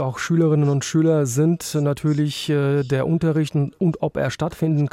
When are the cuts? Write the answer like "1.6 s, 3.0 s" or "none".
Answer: none